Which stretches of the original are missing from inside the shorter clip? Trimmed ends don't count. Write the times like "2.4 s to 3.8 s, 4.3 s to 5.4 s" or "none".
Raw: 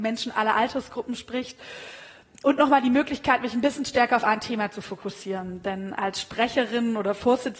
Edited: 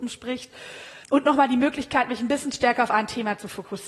2.1 s to 2.4 s